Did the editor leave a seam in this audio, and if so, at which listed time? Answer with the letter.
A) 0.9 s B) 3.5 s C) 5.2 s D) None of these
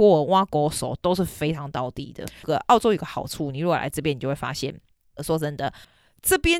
C